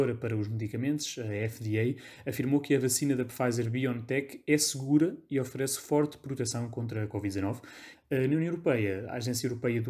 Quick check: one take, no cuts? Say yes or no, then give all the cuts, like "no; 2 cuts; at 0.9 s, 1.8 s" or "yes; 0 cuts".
no; 1 cut; at 7.9 s